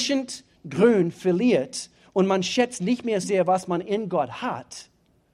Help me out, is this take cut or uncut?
cut